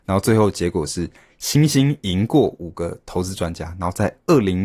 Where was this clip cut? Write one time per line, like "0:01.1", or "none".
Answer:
none